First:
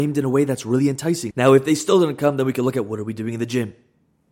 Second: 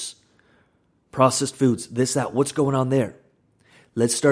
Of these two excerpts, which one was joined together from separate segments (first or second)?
first